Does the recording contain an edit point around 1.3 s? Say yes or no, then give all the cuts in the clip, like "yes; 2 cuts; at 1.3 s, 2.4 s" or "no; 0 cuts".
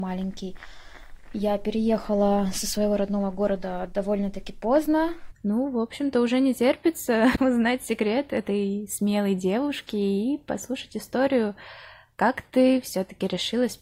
no; 1 cut; at 5.3 s